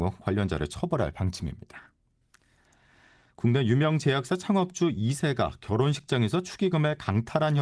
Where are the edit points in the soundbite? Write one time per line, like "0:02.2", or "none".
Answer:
none